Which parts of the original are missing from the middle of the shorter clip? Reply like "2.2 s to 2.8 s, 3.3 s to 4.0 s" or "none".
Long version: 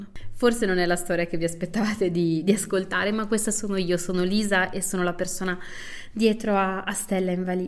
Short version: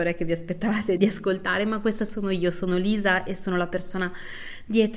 2.1 s to 2.4 s

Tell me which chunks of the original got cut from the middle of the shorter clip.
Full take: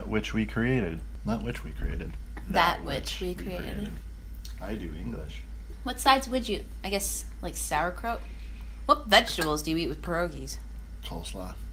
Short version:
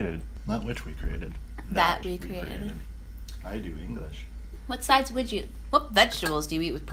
2.8 s to 3.2 s, 6.8 s to 8.8 s

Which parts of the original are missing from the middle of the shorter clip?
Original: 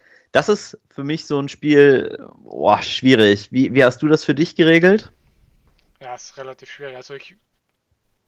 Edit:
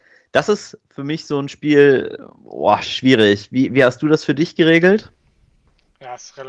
none

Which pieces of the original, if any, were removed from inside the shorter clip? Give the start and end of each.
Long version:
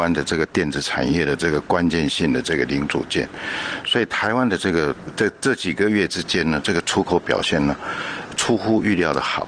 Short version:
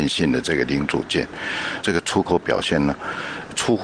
3.8 s to 6.6 s

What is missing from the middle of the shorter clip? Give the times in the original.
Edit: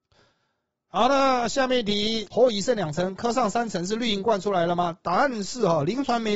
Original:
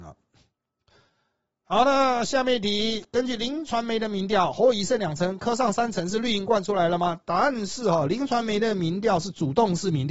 3.1 s to 4.5 s

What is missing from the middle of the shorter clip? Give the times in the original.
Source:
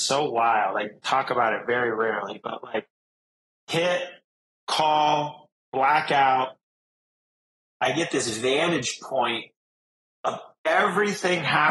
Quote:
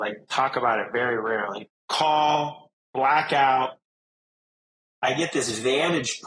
2.4 s to 4.5 s

